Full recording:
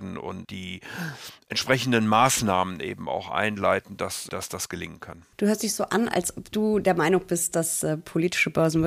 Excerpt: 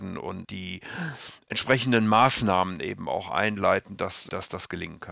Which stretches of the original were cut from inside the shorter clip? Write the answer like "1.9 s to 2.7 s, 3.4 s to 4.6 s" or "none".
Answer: none